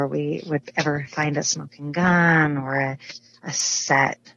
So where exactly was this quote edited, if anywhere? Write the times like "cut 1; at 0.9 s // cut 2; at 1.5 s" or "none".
none